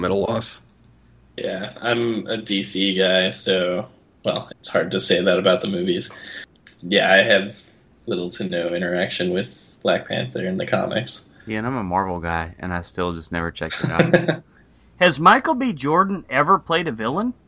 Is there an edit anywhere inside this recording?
yes; 1 cut; at 4.5 s

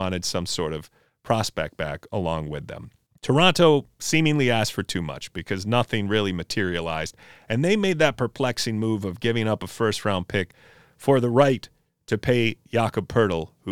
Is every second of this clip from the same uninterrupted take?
yes; 0 cuts

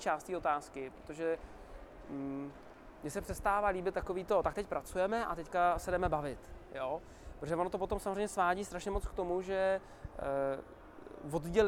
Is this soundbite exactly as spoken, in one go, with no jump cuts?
yes; 0 cuts

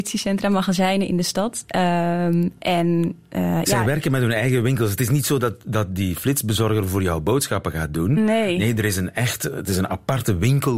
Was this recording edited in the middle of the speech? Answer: no; 0 cuts

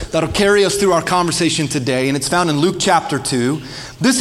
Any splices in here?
no; 0 cuts

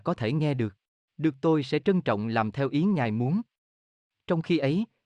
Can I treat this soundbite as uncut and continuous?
no; 1 cut; at 1.1 s

